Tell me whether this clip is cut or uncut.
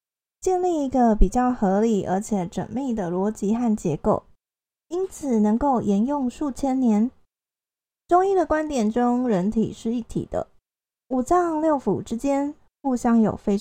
uncut